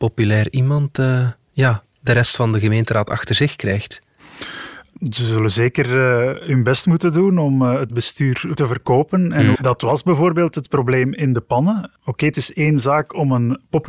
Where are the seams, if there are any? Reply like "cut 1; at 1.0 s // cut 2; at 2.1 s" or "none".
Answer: cut 1; at 9.6 s